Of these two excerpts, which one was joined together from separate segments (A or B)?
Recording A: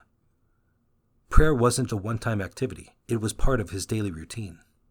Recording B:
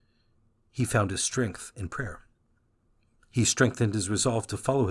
A